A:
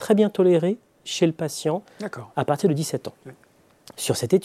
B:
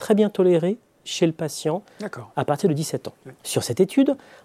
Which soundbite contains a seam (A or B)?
B